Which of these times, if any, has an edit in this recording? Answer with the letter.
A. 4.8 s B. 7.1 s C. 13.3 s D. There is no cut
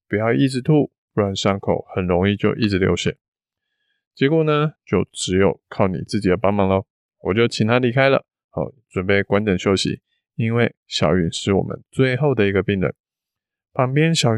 A